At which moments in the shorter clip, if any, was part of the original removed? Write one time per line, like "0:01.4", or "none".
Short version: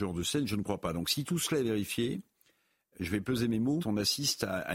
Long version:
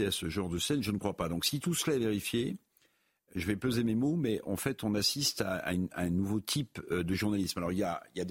0:03.8